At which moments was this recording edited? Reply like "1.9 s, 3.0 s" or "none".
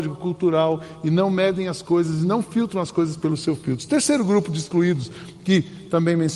none

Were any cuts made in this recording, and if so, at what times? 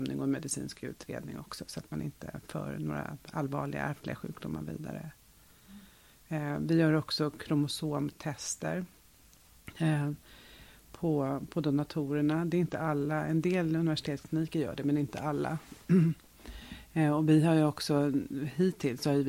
none

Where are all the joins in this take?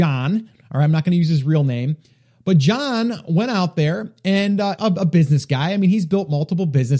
4.8 s

